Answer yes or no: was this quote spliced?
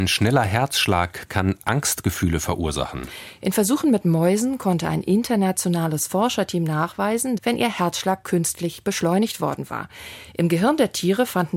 yes